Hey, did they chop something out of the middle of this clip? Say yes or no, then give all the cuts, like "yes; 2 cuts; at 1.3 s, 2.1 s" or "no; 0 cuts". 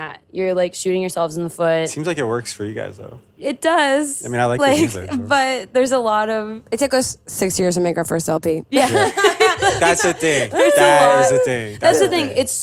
no; 0 cuts